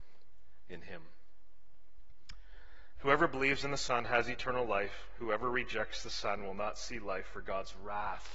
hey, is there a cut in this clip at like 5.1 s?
no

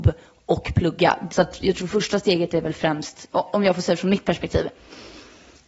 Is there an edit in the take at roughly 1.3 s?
yes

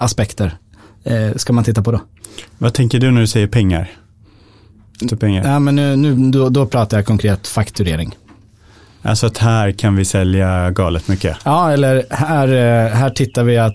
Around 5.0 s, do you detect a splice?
yes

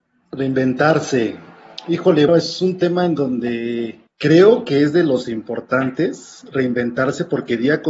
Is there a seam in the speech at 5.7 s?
no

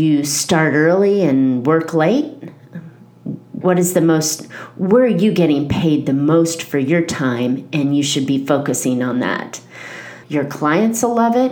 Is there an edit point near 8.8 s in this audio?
no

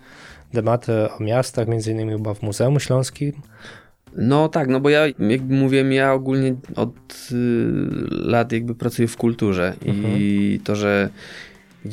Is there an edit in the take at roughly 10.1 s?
no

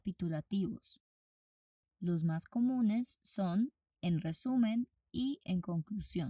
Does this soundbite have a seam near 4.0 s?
no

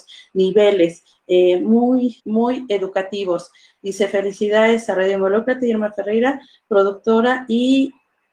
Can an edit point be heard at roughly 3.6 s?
no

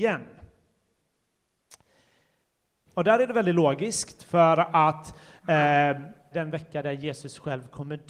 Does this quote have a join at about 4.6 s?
no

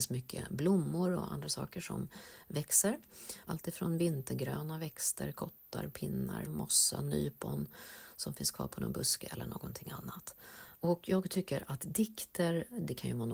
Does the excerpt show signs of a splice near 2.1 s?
no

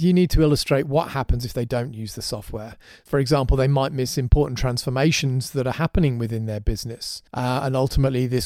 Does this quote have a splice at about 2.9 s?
no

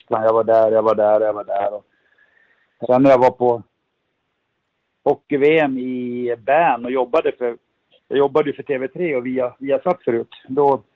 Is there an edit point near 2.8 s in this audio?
yes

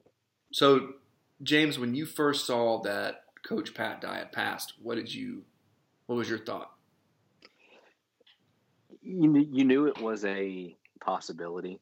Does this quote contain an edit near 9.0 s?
no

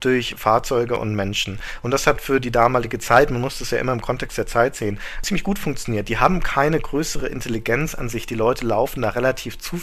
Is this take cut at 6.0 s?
no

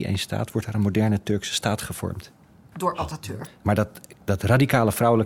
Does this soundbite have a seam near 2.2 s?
no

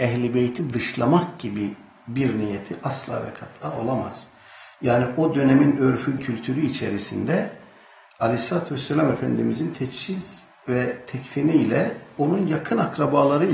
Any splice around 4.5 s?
no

